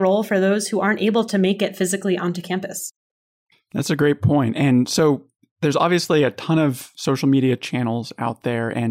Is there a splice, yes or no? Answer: no